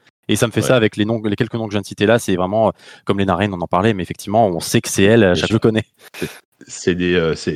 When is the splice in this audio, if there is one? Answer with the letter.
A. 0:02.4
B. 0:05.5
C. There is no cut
B